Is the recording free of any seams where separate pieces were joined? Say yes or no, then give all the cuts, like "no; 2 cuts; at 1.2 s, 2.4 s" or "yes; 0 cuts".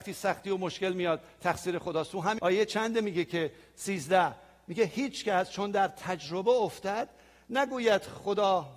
no; 1 cut; at 2.4 s